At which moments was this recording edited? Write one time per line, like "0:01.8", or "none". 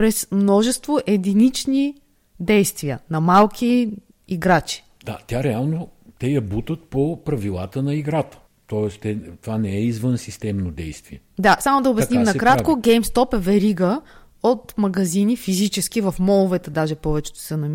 none